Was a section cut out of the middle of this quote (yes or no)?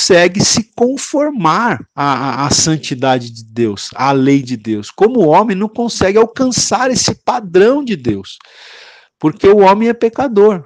no